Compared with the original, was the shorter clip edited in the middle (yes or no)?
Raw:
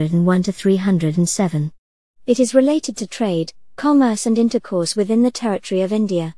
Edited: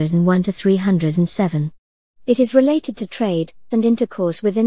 yes